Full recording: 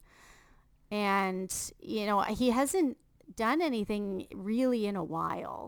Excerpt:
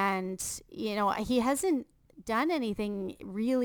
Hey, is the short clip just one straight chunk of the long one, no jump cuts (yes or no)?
yes